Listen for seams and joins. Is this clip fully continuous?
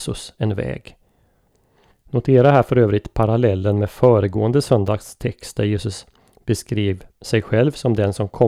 no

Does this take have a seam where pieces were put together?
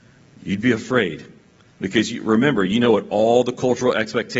no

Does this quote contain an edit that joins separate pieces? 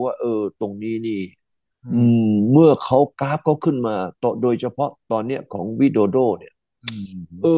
yes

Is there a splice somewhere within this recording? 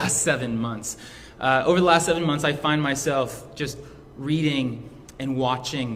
no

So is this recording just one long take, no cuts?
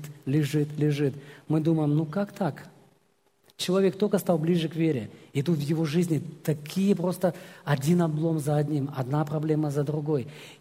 yes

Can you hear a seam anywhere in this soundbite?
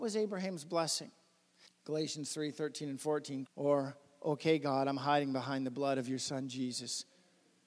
yes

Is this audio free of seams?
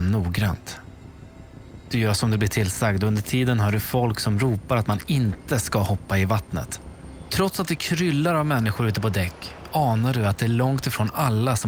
no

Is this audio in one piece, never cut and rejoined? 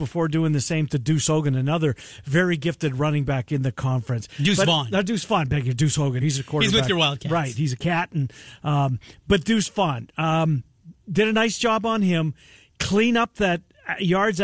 no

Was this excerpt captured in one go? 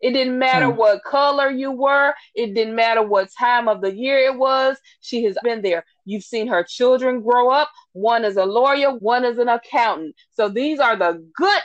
no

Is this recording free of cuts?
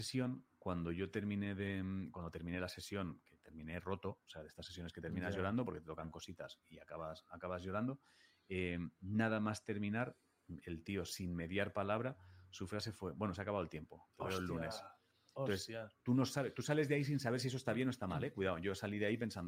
no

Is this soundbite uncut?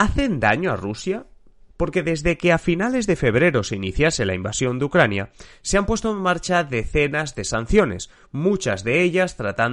no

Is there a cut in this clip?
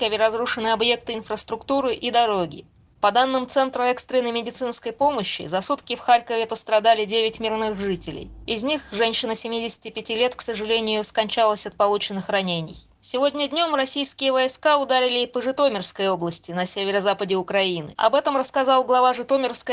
no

